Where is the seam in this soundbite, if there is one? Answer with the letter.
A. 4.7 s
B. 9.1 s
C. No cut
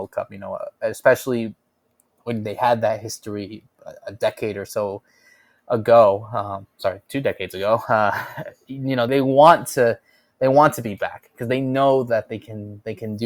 B